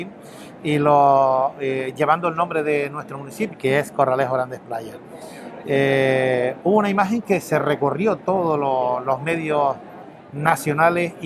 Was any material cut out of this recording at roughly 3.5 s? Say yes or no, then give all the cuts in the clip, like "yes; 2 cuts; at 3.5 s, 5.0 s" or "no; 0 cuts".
yes; 2 cuts; at 3.5 s, 6.6 s